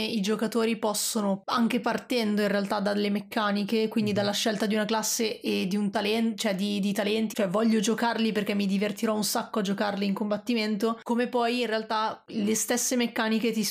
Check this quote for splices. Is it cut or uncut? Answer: cut